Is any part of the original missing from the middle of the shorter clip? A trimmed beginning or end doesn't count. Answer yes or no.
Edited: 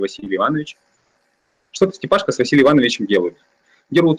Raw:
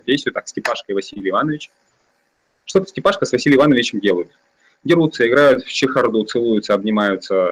no